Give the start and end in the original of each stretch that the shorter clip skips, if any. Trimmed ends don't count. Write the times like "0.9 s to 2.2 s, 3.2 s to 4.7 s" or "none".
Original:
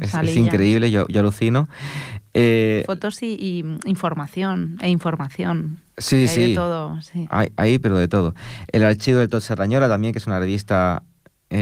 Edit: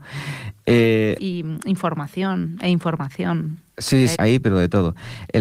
2.9 s to 3.4 s, 6.3 s to 7.5 s

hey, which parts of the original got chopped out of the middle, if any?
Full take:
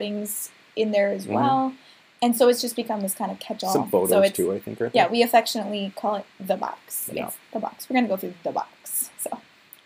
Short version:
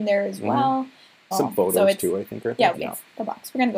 2.2 s to 3.7 s, 5.1 s to 7.1 s

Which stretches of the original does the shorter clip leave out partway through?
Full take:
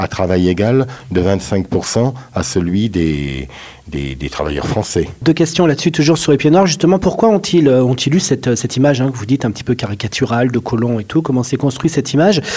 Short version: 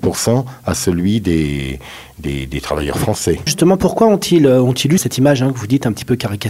5.2 s to 6.7 s, 8.2 s to 8.6 s

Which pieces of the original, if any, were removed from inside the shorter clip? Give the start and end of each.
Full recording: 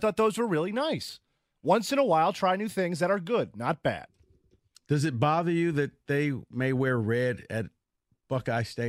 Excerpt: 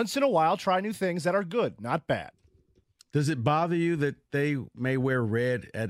none

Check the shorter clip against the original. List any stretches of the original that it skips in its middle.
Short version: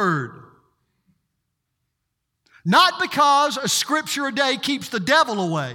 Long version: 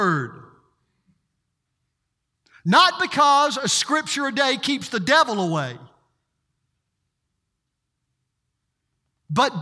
none

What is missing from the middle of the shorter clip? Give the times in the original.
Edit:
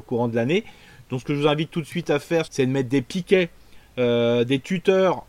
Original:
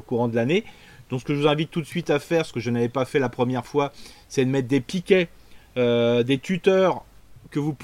2.5 s to 4.3 s

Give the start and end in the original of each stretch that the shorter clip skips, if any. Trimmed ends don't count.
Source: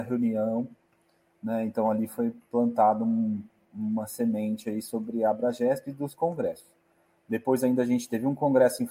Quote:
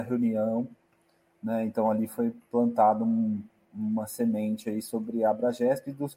none

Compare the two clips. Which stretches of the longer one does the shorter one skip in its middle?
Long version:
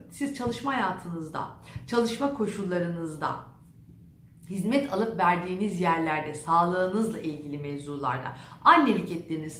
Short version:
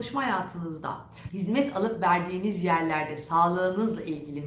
1.8 s to 4.5 s

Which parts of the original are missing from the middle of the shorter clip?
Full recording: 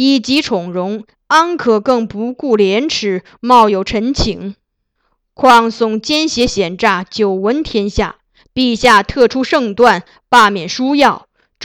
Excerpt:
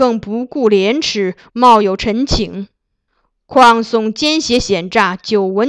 none

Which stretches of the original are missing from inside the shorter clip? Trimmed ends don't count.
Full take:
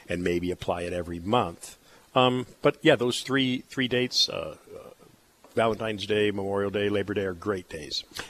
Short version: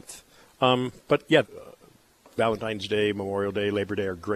3.0 s to 4.6 s

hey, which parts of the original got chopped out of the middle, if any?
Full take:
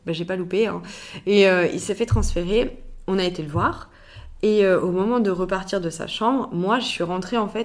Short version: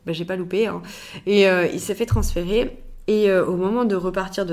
3.1 s to 4.4 s

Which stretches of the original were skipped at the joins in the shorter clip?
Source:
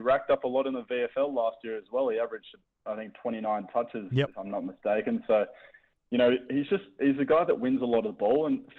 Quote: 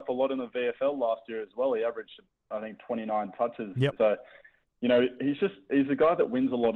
4.3 s to 5.3 s

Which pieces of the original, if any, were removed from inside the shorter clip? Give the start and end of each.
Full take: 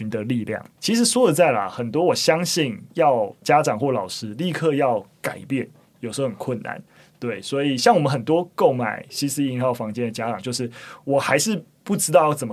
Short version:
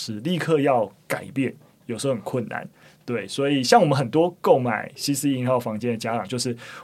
none

